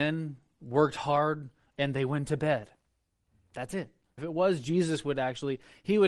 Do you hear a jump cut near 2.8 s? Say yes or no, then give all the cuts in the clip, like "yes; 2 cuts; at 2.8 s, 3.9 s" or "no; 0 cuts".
no; 1 cut; at 4.2 s